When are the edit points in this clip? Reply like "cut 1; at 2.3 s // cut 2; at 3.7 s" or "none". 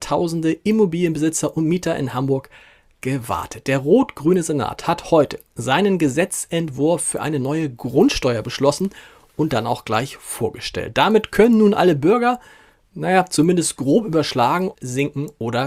cut 1; at 14.7 s